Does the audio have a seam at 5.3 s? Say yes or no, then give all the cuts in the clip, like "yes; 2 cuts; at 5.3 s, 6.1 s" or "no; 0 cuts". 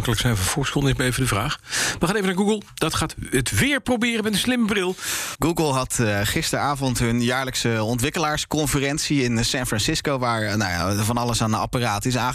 yes; 1 cut; at 5.3 s